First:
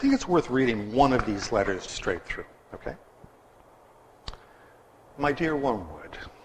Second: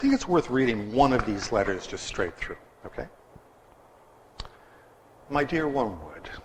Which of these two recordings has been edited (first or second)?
first